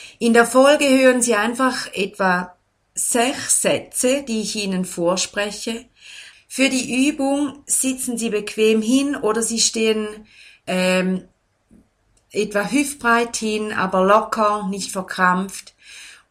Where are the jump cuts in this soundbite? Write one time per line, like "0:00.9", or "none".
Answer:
0:06.3